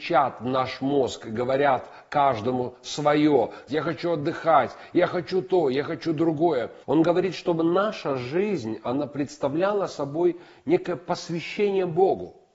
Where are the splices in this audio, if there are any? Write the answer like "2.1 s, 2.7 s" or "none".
3.7 s, 6.8 s